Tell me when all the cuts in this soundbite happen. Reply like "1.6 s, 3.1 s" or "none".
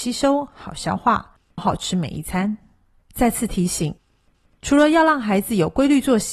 1.6 s, 3.0 s